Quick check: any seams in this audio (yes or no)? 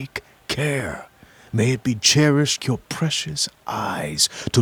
yes